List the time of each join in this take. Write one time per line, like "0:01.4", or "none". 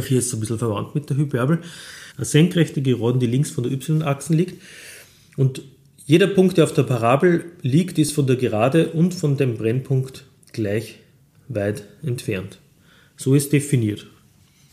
0:02.1